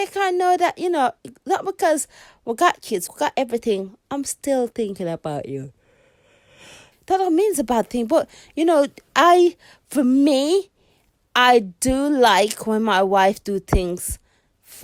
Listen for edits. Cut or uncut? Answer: cut